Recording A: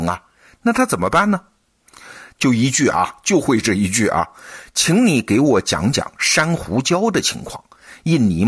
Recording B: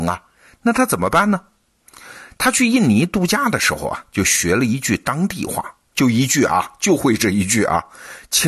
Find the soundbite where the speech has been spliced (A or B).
A